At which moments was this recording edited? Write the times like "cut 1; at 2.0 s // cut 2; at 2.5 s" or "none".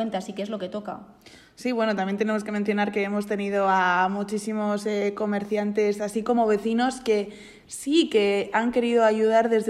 none